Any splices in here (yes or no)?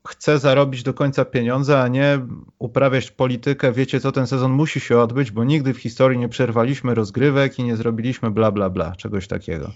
no